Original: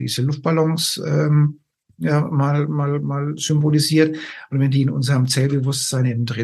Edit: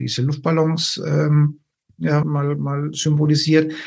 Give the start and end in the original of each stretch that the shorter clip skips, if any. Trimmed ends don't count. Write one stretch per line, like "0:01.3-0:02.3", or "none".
0:02.2-0:02.7

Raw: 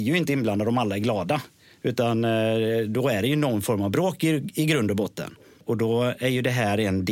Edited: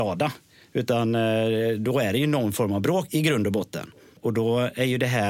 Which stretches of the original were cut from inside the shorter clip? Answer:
0:04.2-0:04.5

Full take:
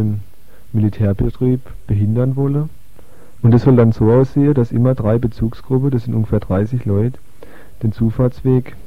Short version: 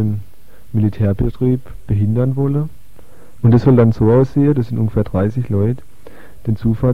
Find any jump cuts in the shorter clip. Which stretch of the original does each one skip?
0:04.5-0:05.9

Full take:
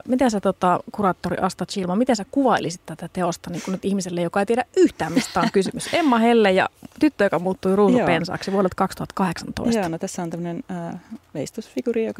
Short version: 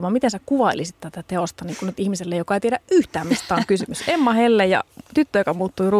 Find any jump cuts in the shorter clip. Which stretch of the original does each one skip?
none

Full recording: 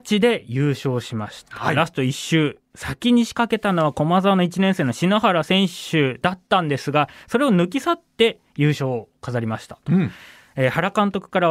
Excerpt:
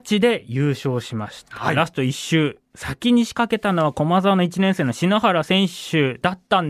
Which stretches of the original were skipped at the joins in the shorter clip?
none

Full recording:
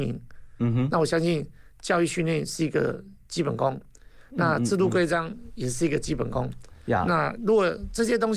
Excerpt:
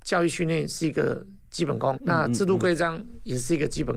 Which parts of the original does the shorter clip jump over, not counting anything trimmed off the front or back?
0:03.7-0:04.3

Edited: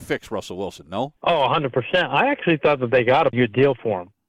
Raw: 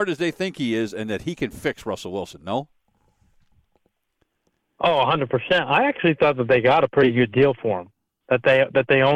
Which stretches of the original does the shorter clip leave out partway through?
0:02.7-0:04.7
0:06.9-0:07.1

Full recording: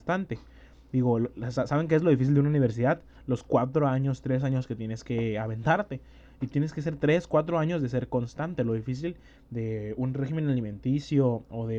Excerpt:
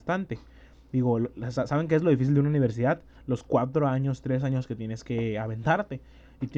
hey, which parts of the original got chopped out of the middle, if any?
none

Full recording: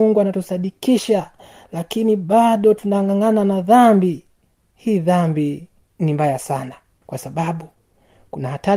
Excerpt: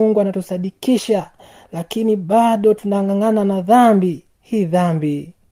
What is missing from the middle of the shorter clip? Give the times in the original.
0:04.3-0:04.7

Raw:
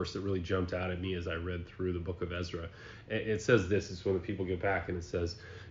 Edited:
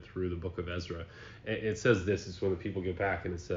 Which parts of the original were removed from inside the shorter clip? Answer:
none

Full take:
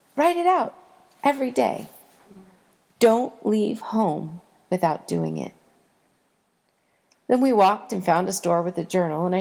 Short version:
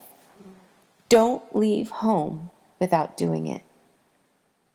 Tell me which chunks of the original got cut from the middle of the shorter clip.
none

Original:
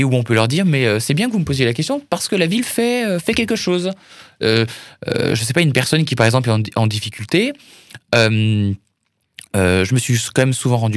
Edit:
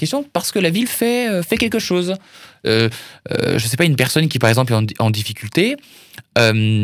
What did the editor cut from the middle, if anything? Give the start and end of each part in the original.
none

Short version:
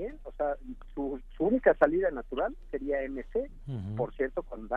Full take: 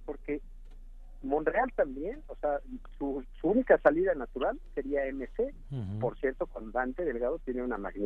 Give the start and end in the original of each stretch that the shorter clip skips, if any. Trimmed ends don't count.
none

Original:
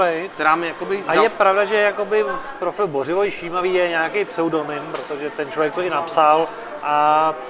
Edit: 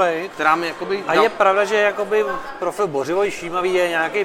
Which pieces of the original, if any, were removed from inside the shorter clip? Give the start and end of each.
none

